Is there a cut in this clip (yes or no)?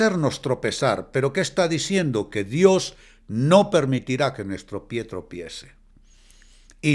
no